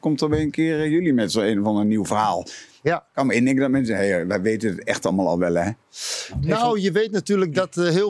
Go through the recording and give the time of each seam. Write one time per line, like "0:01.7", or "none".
none